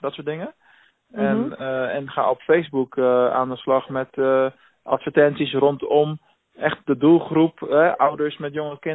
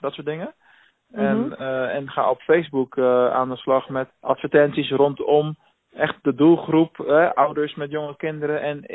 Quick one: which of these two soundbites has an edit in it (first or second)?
second